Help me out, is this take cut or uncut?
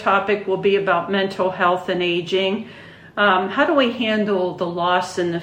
uncut